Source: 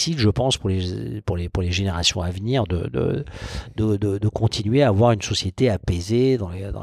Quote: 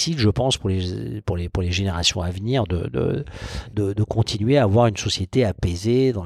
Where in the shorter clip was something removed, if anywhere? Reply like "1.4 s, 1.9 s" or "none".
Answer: 3.7 s